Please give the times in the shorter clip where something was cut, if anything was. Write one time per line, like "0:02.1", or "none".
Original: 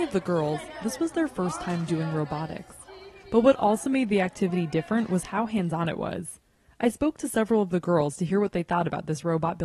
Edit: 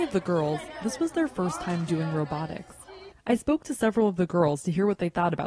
0:03.1